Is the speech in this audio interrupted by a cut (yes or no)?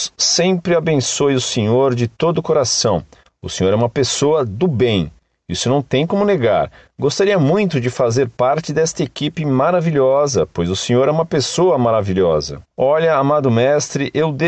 no